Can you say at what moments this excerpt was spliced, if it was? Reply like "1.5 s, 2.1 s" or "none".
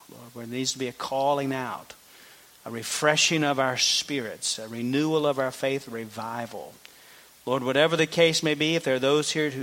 none